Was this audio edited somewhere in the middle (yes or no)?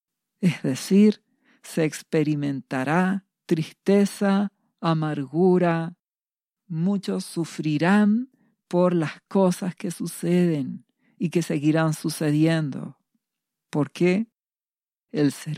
no